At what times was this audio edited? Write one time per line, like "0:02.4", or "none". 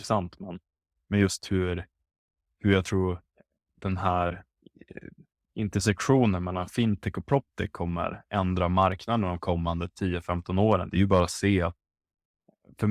none